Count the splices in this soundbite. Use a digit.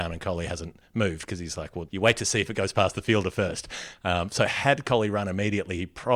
1